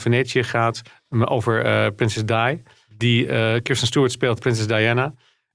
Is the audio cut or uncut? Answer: uncut